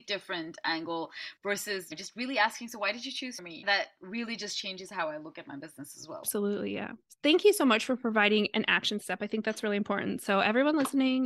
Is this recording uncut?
yes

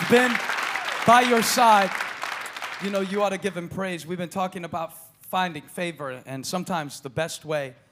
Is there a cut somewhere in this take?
no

